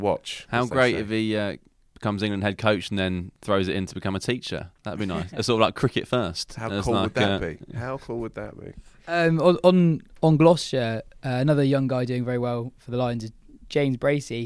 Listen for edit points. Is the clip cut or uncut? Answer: uncut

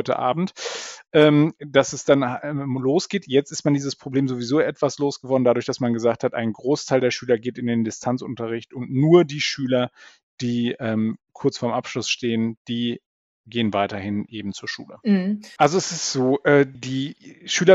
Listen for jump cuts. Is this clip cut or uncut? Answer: cut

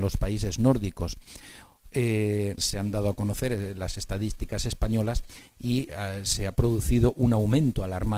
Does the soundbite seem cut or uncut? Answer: cut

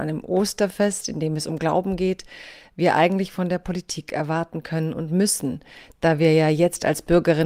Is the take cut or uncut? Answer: uncut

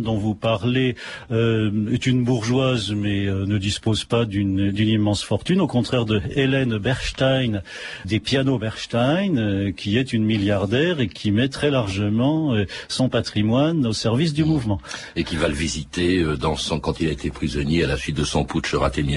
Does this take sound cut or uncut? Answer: cut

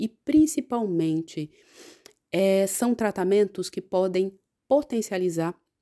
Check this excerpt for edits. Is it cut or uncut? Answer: uncut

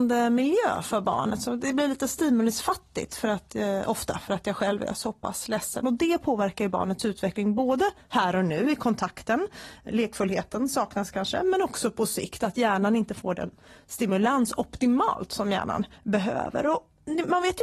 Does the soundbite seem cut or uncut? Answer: cut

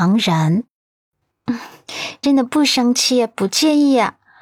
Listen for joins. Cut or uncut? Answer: cut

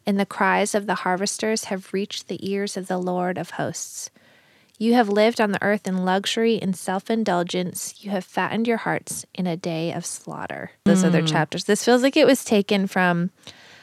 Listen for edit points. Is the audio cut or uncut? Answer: cut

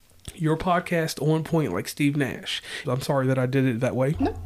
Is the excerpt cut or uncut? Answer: cut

